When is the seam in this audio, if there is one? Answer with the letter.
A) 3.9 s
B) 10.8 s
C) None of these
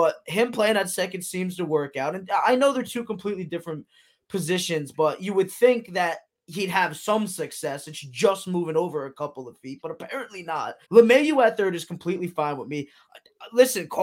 B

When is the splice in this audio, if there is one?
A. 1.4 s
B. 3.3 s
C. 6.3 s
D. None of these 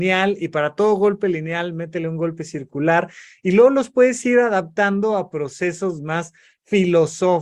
D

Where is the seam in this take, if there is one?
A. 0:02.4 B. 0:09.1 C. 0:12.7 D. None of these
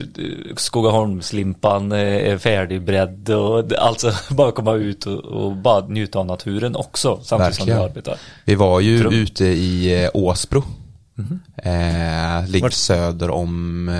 C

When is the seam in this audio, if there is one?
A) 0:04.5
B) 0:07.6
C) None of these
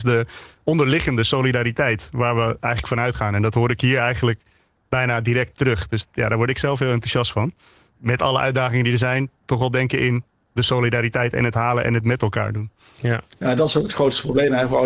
C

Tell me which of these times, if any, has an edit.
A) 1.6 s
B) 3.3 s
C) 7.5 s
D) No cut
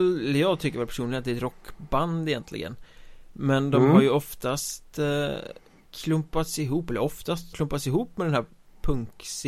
C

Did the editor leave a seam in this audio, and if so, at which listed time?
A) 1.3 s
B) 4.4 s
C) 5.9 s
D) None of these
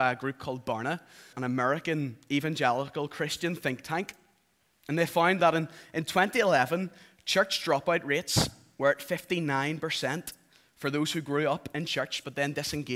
A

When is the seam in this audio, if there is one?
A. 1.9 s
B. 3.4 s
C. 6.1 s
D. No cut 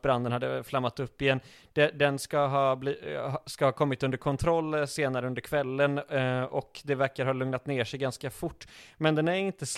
D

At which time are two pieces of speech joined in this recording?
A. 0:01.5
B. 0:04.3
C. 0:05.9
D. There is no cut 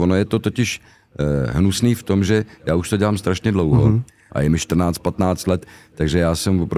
B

